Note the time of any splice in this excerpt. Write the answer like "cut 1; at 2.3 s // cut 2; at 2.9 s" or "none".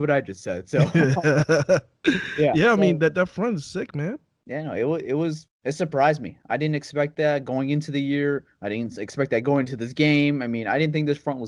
none